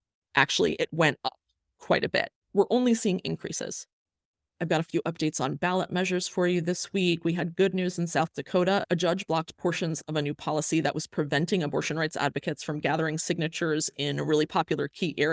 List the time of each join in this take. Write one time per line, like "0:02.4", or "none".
0:02.4